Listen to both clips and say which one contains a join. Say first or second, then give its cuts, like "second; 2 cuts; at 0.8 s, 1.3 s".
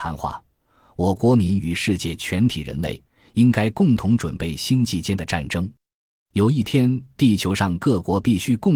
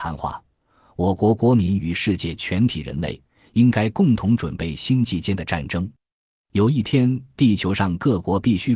first; 1 cut; at 1.2 s